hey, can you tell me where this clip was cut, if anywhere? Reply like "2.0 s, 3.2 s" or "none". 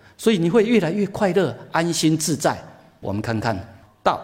none